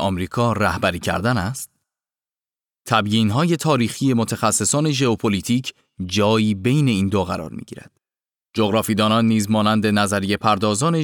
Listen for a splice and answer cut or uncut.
cut